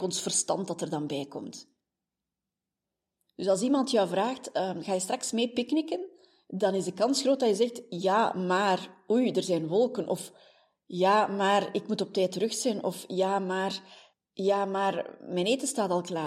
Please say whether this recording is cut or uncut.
uncut